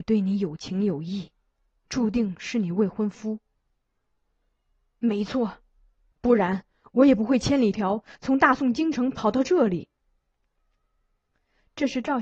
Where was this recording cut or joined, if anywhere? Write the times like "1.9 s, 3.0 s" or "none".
6.1 s, 7.7 s